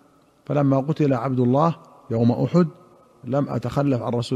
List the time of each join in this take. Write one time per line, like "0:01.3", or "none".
none